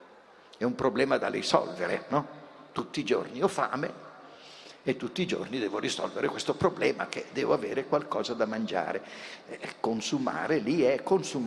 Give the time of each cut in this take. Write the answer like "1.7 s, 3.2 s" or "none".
none